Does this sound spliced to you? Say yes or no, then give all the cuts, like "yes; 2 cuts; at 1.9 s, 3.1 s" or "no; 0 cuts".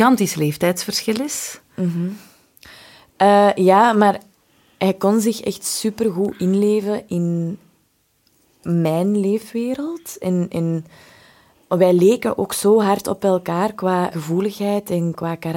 yes; 2 cuts; at 11.7 s, 14.1 s